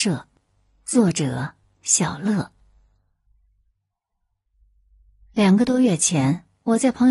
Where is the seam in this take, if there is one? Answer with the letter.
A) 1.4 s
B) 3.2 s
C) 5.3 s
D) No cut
D